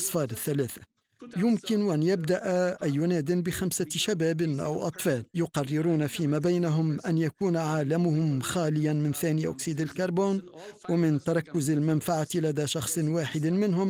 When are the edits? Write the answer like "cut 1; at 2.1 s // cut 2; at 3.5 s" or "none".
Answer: cut 1; at 5.3 s